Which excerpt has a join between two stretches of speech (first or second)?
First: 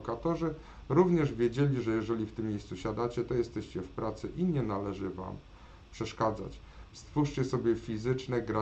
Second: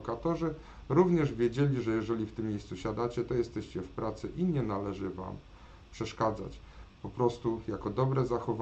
first